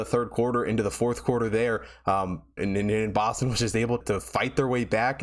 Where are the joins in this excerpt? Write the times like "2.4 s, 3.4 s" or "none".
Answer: 2.6 s, 4.0 s